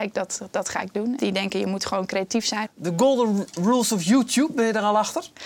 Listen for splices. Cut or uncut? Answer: cut